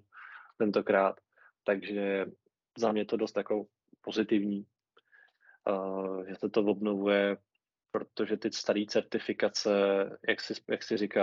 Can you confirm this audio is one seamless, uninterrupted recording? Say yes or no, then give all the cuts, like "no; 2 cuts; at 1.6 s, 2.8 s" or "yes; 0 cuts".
yes; 0 cuts